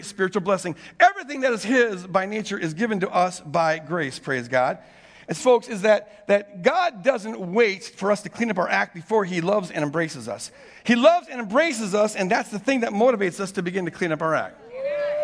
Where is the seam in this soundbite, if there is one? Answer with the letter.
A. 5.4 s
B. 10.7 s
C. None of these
A